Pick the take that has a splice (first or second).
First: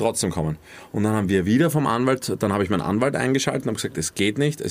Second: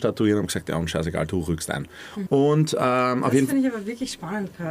second